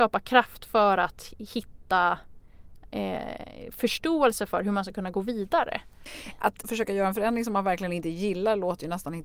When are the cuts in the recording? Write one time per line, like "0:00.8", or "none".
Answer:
0:06.6